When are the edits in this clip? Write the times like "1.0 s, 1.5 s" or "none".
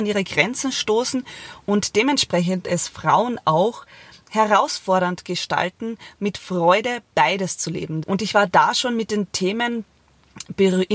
8.0 s